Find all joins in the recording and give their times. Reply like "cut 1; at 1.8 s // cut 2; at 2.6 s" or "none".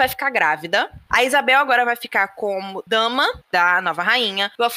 cut 1; at 1.1 s